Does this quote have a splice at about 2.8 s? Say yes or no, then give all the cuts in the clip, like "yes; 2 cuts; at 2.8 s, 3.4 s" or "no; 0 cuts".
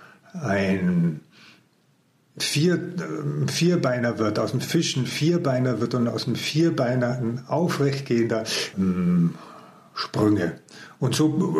no; 1 cut; at 8.7 s